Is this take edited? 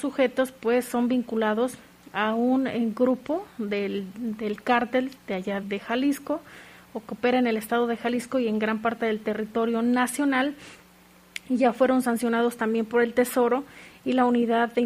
yes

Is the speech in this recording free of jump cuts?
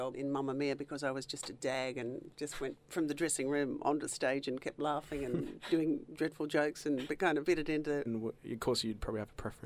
no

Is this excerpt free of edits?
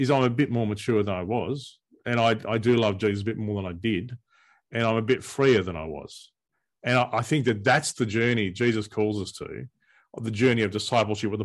yes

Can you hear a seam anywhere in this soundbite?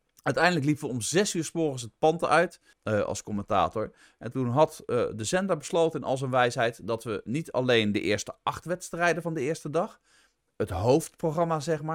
yes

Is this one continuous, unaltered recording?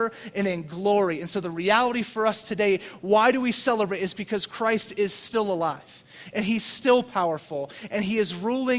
yes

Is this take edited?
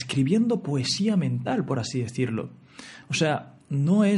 no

